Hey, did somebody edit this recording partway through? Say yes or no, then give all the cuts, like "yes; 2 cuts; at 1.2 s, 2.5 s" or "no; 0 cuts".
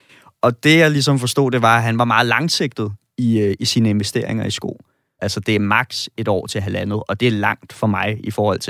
yes; 1 cut; at 5.2 s